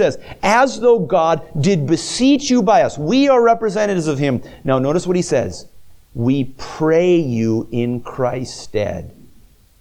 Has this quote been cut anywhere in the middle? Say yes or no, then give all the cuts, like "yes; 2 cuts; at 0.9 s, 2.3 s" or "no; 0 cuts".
no; 0 cuts